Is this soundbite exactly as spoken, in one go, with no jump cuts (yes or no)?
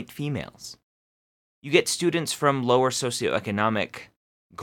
yes